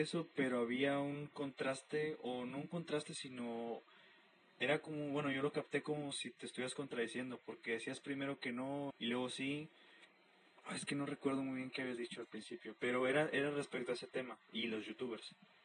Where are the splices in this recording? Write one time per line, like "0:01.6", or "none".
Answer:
0:08.9